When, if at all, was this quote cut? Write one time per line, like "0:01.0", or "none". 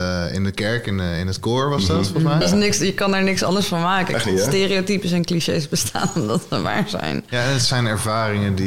0:02.4